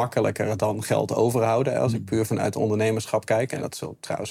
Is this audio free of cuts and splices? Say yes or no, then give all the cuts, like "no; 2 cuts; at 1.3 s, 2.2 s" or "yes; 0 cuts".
yes; 0 cuts